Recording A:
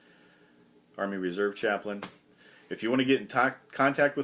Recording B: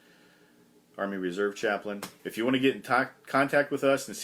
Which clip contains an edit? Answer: B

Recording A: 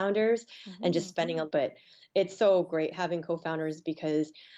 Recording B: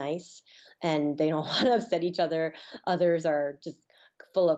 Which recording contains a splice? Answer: A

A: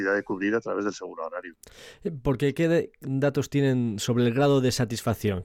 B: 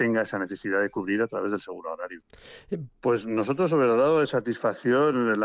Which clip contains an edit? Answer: B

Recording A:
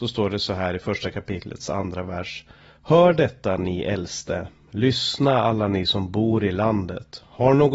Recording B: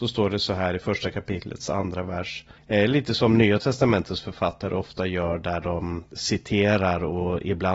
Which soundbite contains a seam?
B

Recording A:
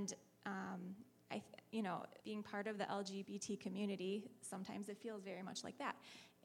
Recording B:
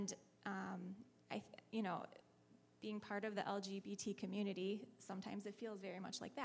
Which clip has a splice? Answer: A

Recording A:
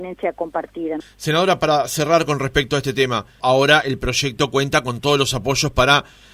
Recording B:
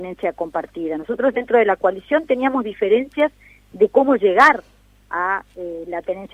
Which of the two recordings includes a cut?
A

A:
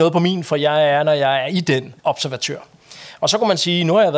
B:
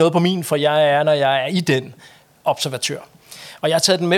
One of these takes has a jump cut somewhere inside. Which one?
A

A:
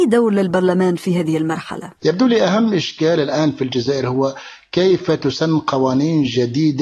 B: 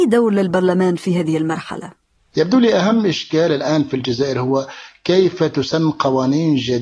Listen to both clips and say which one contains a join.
A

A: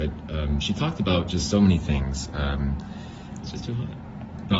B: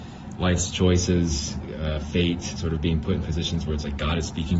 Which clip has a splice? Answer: A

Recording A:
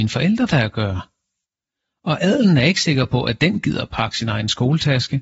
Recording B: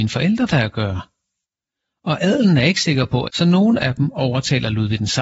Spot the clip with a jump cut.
B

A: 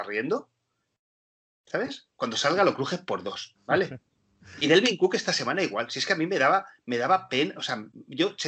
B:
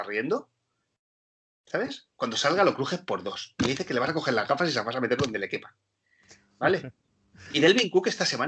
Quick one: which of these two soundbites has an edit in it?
A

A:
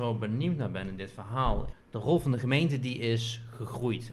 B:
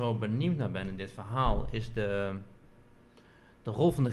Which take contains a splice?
A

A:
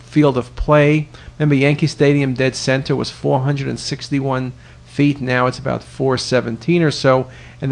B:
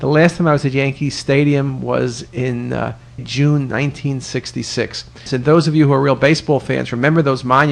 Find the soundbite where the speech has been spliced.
B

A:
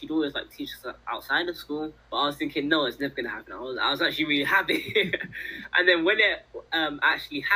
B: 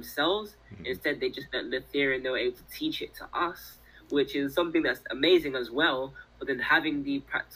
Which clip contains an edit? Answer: A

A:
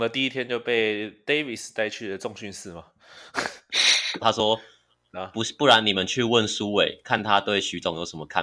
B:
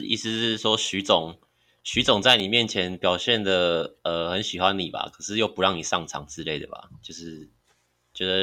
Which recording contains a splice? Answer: A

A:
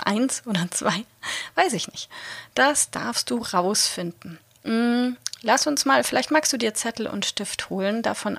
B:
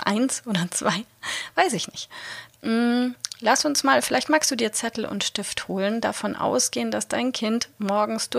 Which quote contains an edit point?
B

